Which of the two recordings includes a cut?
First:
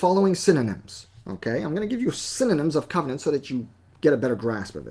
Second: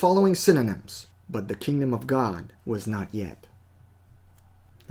second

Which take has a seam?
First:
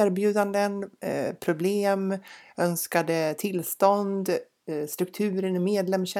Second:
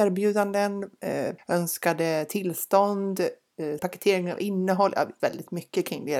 second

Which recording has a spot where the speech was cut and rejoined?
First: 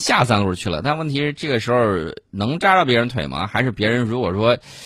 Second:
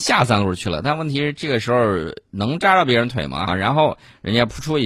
second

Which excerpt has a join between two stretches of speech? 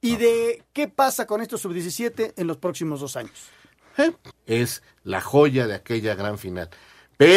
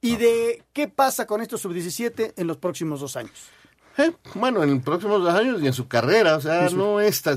first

